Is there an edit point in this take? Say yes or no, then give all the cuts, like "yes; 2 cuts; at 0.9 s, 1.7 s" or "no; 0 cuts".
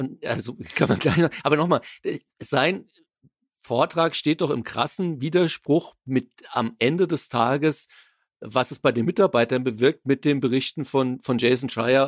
no; 0 cuts